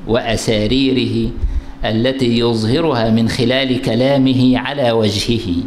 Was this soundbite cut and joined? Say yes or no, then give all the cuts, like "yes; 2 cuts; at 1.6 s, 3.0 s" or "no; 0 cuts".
no; 0 cuts